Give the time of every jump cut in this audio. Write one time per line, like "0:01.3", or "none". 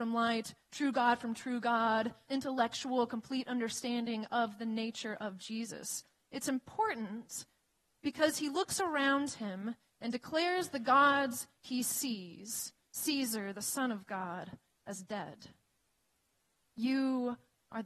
0:02.3